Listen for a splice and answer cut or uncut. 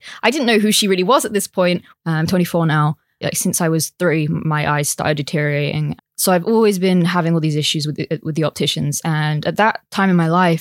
cut